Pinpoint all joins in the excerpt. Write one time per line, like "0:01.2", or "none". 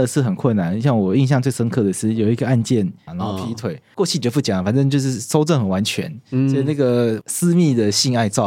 0:03.1